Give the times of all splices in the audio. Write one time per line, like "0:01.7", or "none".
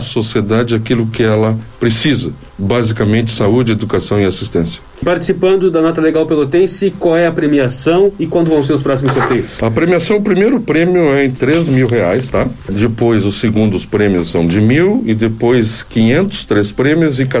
none